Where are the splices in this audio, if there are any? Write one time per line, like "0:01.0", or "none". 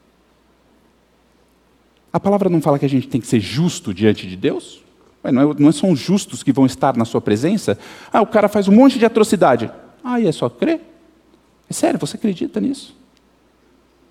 none